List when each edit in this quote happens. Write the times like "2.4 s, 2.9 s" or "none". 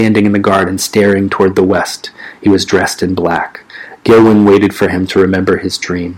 none